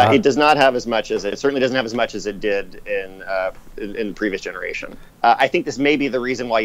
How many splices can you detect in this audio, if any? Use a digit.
2